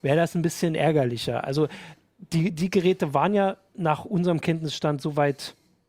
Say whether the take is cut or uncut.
uncut